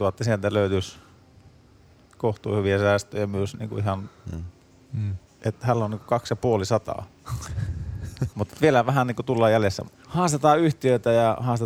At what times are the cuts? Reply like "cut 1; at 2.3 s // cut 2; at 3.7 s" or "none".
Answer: cut 1; at 5.3 s // cut 2; at 8.3 s // cut 3; at 9.8 s